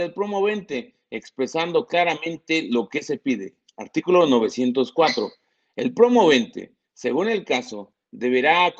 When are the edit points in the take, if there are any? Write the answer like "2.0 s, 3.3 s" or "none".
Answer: none